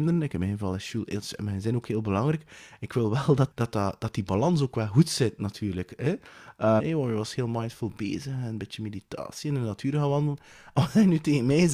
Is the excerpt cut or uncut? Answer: cut